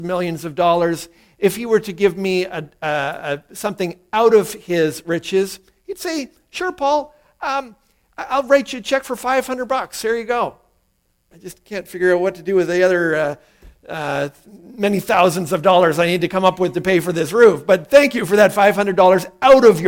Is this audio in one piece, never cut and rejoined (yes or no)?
no